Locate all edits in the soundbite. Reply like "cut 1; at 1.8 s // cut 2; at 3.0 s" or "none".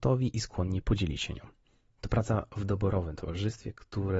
none